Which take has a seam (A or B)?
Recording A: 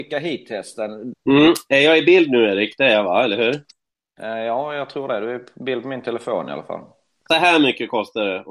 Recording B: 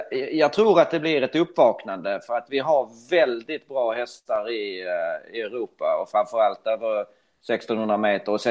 A